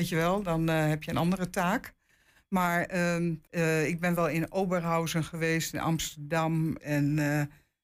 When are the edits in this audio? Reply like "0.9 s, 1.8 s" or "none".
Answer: 3.5 s, 6.8 s